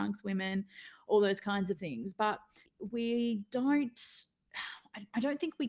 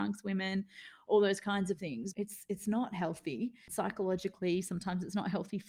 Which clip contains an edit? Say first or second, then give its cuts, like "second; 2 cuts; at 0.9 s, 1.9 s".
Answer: second; 1 cut; at 2.1 s